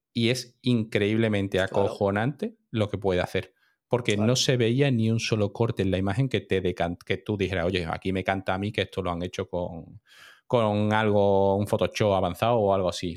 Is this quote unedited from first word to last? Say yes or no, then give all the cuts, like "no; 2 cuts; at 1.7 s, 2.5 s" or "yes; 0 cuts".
yes; 0 cuts